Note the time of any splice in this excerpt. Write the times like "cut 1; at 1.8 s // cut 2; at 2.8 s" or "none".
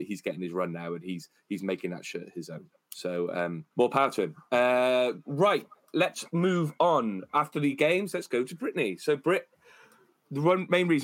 cut 1; at 3.7 s